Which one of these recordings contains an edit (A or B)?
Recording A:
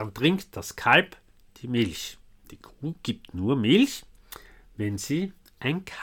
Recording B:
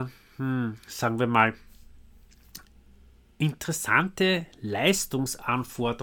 A